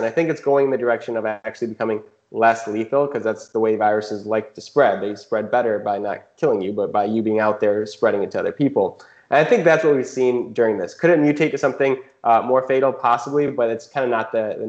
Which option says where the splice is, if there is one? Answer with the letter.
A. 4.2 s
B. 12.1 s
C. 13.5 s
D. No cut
D